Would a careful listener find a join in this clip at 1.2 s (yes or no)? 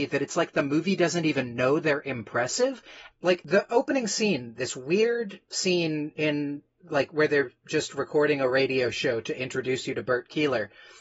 no